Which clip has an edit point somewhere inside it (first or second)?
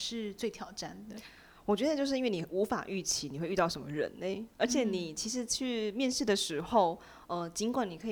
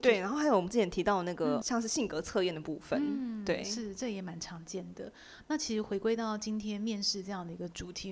second